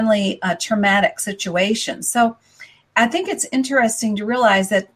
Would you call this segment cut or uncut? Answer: uncut